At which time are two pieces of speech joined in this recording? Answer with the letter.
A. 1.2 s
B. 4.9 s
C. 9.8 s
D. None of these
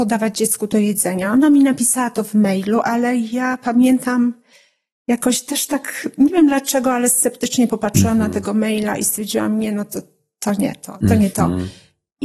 D